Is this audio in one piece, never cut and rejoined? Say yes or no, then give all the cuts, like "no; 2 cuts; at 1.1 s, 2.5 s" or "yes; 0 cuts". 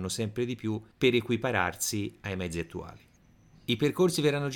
yes; 0 cuts